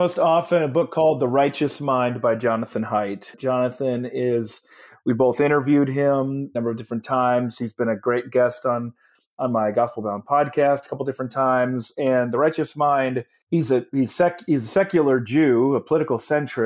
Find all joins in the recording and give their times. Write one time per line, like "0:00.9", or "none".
none